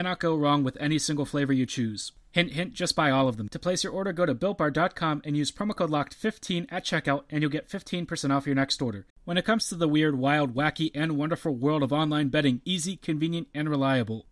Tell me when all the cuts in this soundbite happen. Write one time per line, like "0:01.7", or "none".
0:03.5
0:09.1
0:12.6